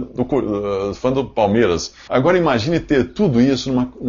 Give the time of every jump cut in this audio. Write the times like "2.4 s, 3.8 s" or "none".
2.1 s